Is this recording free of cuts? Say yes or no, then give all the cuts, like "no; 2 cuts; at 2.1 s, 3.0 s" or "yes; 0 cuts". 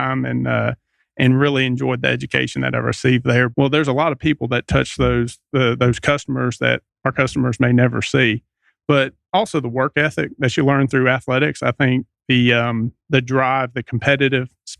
no; 1 cut; at 3.5 s